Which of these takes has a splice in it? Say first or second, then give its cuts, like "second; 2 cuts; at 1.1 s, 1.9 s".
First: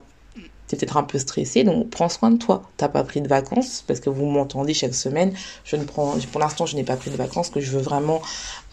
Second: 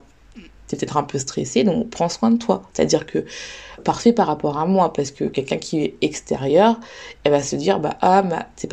second; 2 cuts; at 2.7 s, 3.8 s